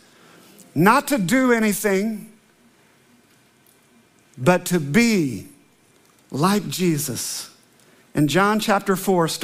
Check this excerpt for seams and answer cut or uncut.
uncut